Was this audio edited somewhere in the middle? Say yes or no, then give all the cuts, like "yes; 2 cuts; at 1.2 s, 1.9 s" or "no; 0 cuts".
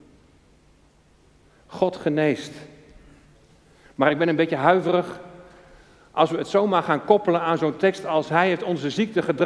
no; 0 cuts